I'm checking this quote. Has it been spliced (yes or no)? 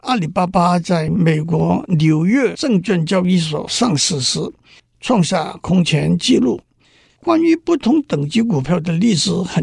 yes